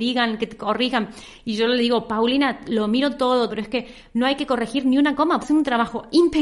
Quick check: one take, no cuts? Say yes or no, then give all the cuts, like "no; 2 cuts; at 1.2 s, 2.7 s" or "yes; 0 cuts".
no; 2 cuts; at 3.5 s, 5.4 s